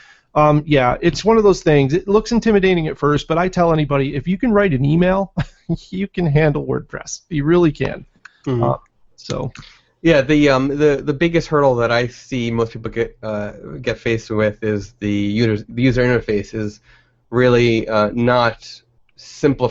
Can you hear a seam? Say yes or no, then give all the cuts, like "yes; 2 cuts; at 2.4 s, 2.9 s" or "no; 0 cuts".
no; 0 cuts